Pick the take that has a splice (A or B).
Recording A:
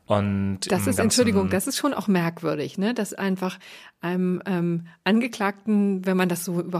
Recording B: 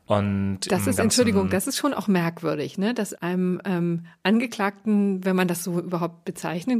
B